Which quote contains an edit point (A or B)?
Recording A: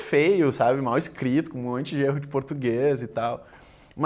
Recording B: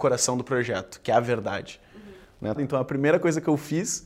B